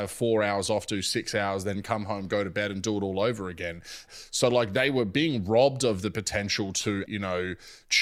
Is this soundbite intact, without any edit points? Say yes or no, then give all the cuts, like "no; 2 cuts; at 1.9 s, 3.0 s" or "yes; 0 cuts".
no; 2 cuts; at 4.1 s, 7.1 s